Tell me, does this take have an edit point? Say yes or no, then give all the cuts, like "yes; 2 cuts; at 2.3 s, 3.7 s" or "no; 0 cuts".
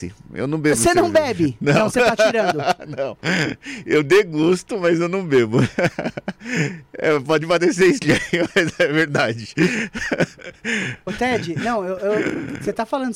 no; 0 cuts